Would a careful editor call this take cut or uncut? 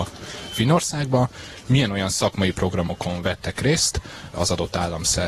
cut